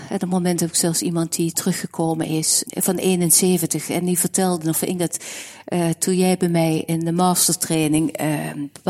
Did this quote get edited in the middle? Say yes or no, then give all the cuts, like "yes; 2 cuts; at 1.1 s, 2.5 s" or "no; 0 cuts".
yes; 1 cut; at 2.7 s